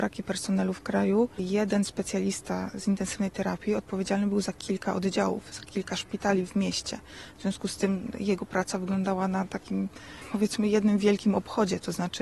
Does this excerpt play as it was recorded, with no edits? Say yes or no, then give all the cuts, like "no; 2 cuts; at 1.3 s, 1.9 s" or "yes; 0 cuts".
yes; 0 cuts